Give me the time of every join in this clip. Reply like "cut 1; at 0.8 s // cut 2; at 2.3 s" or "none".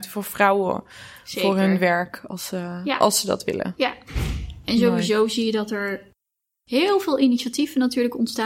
none